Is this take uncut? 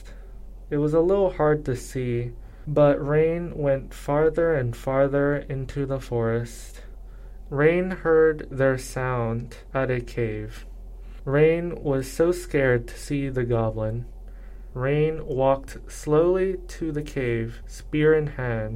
no; 1 cut; at 7.5 s

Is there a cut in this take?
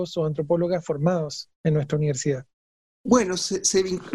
no; 0 cuts

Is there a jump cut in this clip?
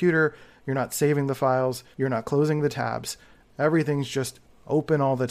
yes; 1 cut; at 1.9 s

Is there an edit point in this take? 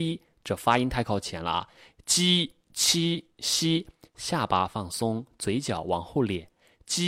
no; 0 cuts

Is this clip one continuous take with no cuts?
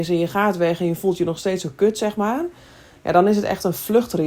yes; 0 cuts

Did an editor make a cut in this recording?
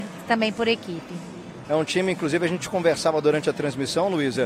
yes; 1 cut; at 1.6 s

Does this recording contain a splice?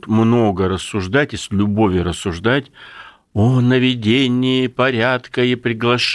no; 0 cuts

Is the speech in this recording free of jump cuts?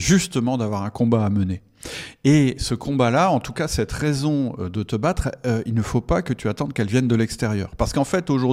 yes; 0 cuts

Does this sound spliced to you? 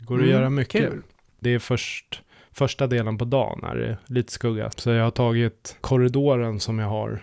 yes; 3 cuts; at 1.4 s, 4.7 s, 5.8 s

